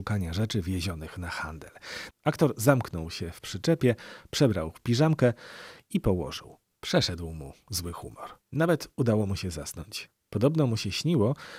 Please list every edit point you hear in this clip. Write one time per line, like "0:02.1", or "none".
0:02.1
0:06.7
0:08.4